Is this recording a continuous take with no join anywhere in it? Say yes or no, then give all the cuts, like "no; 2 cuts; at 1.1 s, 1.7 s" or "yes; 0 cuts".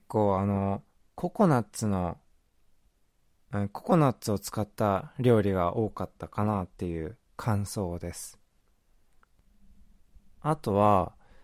yes; 0 cuts